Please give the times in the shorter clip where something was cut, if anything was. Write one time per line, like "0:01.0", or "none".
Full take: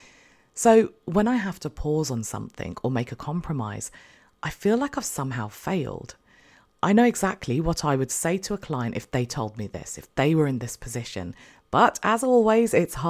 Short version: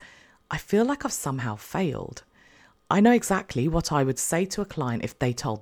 none